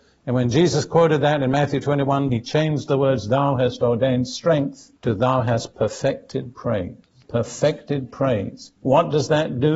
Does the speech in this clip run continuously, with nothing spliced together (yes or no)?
no